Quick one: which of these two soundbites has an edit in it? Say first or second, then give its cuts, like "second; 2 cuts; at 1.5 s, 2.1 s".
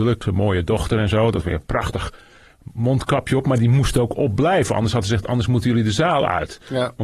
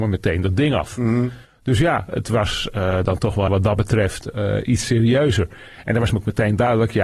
second; 1 cut; at 3.5 s